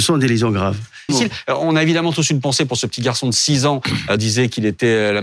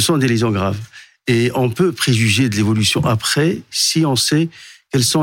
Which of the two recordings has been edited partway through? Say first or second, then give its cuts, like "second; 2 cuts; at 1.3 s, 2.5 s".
first; 2 cuts; at 1.1 s, 4.2 s